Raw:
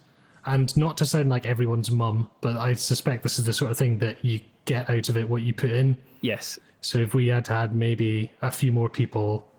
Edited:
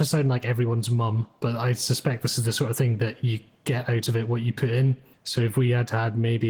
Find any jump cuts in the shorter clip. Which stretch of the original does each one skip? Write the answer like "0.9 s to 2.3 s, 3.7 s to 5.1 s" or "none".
6.1 s to 6.7 s